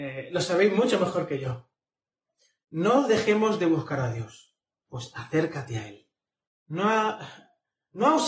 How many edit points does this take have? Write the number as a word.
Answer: two